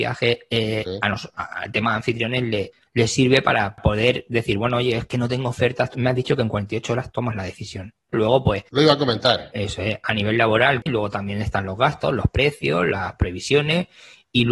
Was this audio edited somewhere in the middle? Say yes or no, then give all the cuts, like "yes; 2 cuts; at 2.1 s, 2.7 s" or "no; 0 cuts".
yes; 3 cuts; at 5.9 s, 8.1 s, 10.9 s